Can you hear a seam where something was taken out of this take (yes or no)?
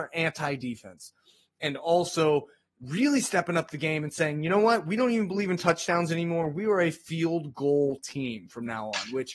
no